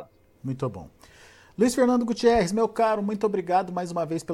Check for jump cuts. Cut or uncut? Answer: uncut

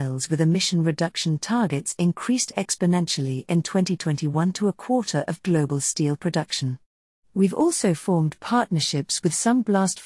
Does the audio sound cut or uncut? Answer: cut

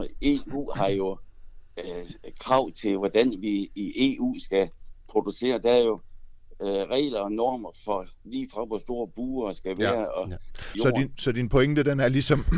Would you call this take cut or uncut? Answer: cut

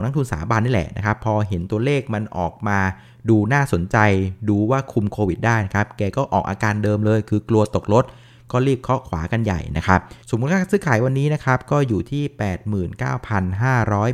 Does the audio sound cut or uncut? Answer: cut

